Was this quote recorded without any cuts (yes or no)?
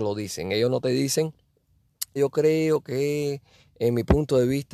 no